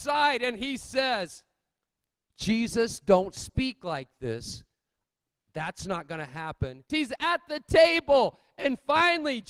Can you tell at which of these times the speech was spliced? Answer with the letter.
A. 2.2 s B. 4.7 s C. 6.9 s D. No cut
C